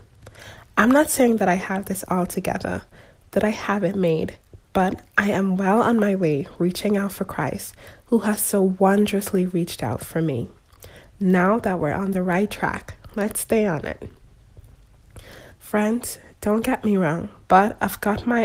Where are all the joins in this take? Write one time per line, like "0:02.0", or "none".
0:11.0
0:15.5
0:17.4